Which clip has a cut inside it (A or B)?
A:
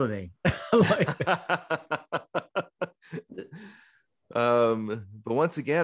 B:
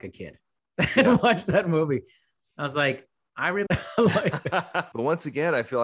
B